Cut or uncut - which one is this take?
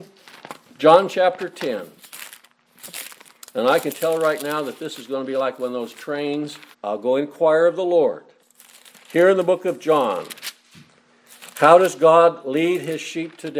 cut